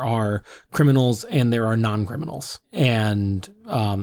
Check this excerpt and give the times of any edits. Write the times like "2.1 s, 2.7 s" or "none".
2.6 s

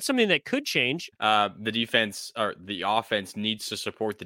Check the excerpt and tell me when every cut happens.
1.1 s

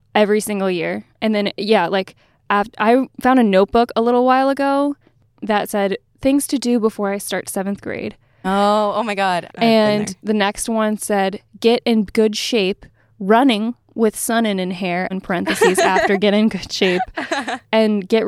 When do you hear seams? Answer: 8.4 s, 9.5 s, 15.1 s

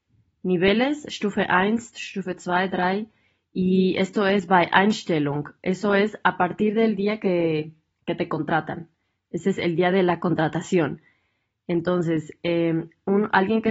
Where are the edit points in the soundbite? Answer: none

